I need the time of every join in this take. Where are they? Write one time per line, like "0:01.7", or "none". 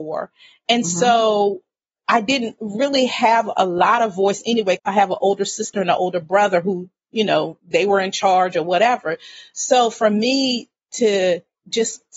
0:04.8